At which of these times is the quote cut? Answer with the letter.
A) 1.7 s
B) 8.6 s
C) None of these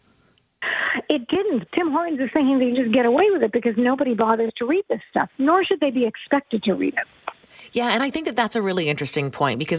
A